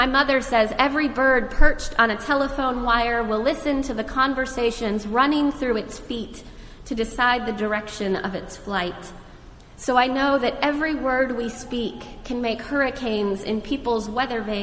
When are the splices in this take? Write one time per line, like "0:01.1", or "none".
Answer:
none